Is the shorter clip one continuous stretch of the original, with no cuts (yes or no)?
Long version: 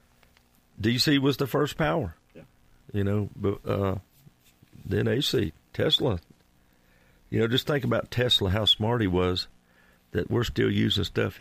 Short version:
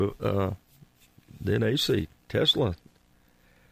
yes